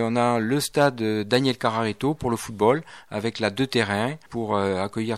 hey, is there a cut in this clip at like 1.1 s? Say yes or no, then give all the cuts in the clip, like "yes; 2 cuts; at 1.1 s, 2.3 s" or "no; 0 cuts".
no; 1 cut; at 4.3 s